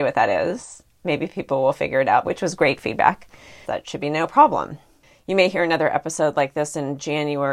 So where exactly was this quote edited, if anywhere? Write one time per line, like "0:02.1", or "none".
0:02.2
0:03.6

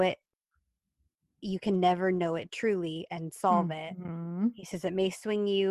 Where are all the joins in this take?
none

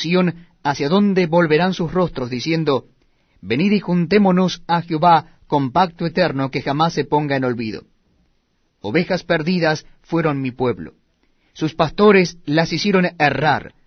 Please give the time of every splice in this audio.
none

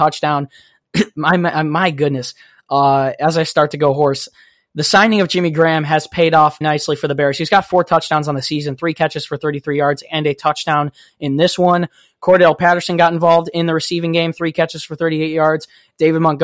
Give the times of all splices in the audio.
0:06.6

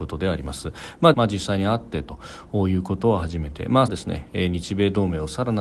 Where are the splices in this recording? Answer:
0:01.1
0:03.9

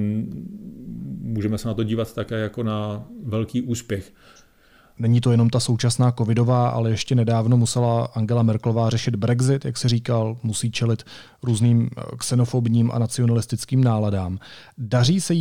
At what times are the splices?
0:05.0

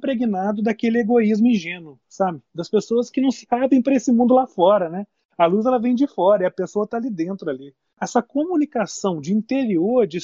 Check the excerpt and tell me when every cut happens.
none

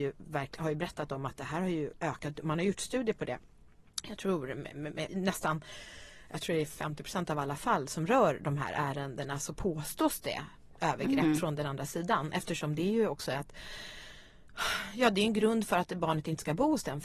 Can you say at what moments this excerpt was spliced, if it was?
0:05.1

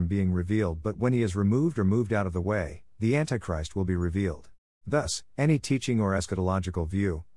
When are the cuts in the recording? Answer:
0:04.8

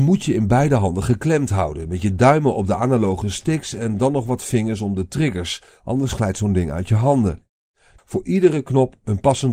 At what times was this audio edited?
0:08.0

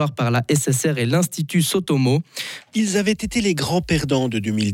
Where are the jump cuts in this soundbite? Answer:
0:02.6

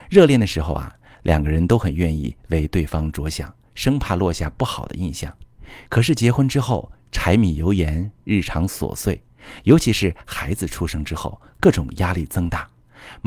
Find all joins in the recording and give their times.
0:05.9

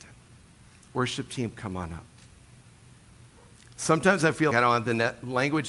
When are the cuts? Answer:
0:04.5

